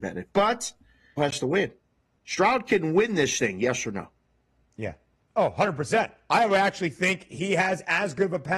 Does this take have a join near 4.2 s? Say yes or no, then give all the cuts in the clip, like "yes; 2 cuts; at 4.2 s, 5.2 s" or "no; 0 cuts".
no; 1 cut; at 1.2 s